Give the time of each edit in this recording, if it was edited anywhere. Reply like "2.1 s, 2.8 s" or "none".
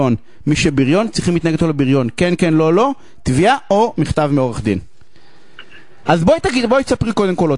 6.0 s

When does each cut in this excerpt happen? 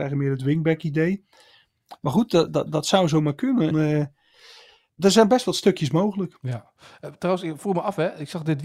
2.5 s, 3.7 s

